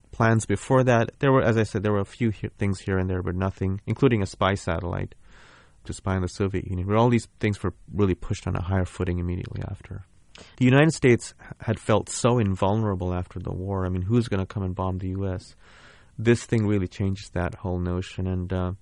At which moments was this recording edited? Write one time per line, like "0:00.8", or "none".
0:10.5